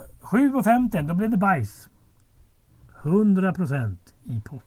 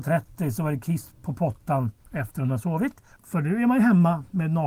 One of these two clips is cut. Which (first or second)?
second